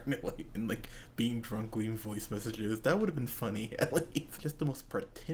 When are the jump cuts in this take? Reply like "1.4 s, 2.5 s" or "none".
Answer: 4.4 s